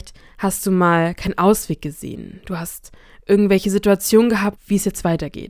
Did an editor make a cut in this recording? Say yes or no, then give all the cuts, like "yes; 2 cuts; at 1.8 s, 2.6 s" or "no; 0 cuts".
yes; 1 cut; at 4.6 s